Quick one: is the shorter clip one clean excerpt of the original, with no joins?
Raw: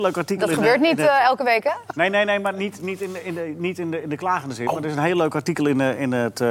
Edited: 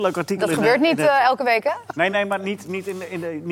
no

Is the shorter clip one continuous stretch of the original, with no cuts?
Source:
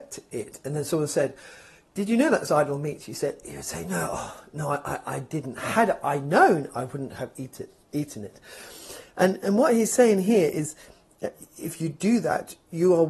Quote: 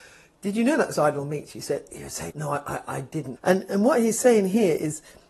no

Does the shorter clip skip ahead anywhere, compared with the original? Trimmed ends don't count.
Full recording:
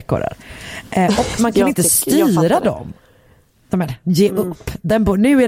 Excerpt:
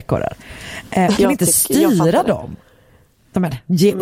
yes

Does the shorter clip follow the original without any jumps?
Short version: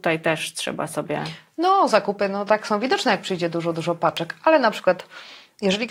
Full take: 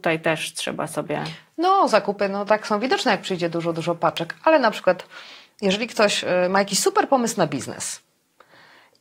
yes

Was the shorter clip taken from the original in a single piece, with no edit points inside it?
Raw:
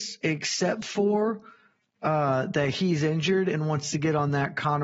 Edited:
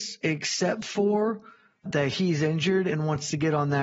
no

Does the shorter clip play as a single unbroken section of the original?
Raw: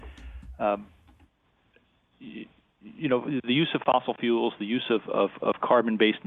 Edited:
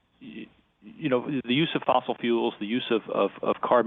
yes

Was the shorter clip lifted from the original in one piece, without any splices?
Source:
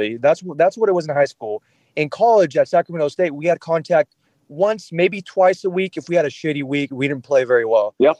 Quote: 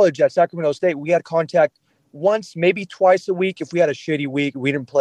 yes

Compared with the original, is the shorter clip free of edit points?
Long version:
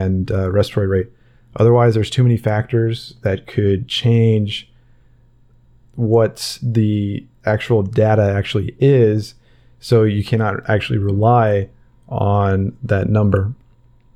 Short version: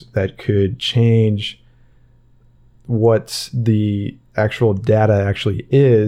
yes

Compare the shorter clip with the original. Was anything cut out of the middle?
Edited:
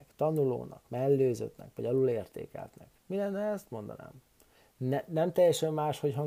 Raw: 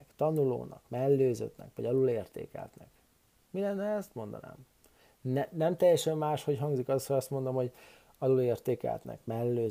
yes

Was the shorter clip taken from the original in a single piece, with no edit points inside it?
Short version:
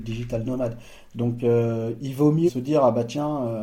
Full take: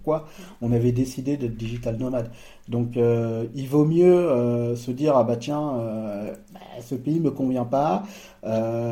no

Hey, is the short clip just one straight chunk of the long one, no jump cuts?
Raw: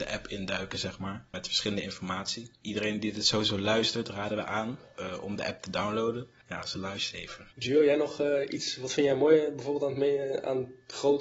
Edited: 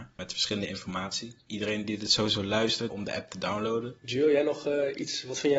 no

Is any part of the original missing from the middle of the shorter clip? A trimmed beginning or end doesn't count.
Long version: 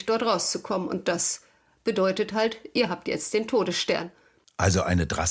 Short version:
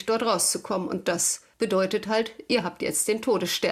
yes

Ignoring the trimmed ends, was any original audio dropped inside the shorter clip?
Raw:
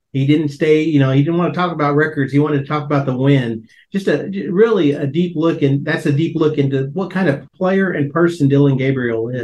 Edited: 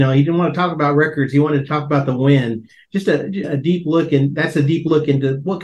yes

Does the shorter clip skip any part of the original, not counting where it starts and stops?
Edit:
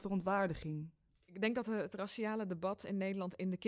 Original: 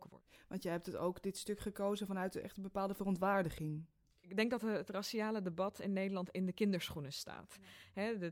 no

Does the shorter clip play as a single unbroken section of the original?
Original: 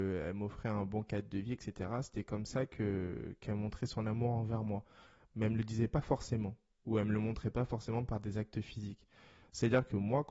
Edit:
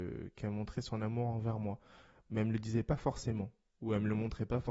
yes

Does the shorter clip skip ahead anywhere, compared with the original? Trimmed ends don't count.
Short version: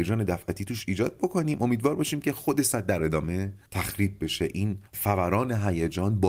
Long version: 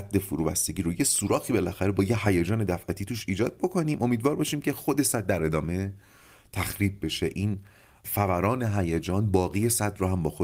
yes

